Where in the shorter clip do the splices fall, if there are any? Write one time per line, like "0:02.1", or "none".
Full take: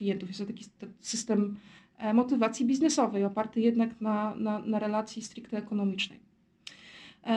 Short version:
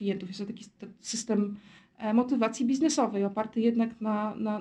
none

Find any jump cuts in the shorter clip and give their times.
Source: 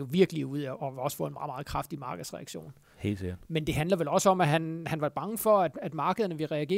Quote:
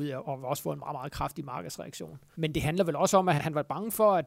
0:02.3
0:03.4

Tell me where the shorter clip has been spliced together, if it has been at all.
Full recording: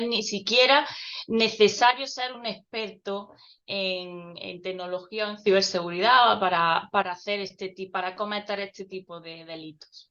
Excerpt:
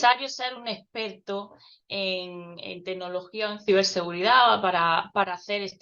none

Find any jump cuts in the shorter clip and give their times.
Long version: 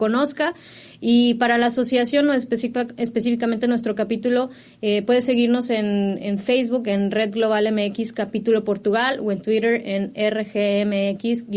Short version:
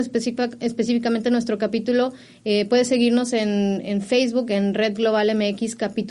none

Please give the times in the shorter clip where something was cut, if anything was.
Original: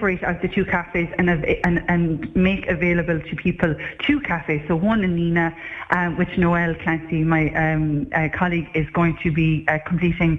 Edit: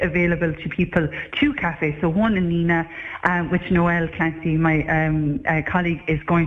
none

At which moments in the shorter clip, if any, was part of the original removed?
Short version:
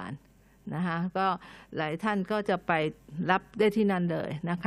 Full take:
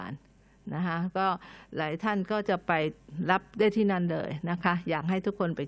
none

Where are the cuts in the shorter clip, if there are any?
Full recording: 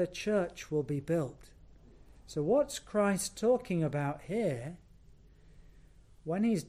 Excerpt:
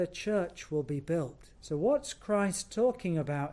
0:01.5

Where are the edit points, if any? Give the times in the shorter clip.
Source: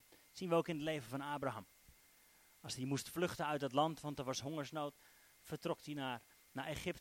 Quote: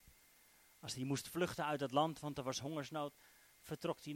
none

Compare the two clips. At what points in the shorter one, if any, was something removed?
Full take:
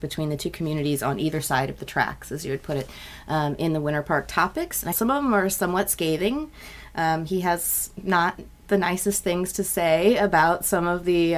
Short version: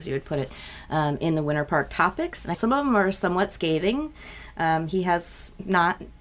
none

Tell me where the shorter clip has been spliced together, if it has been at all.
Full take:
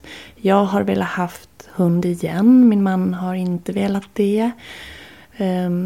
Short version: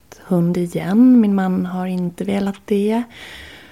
none

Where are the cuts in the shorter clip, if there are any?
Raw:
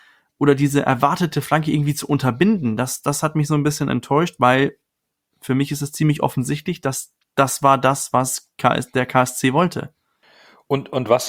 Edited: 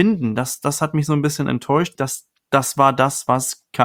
0:02.0

